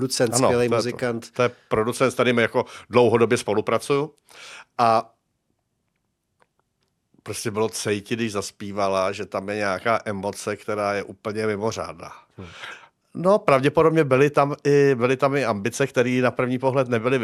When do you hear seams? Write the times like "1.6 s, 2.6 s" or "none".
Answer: 13.0 s